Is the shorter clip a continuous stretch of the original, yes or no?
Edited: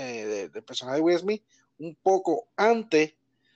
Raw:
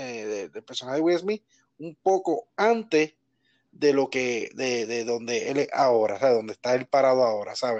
yes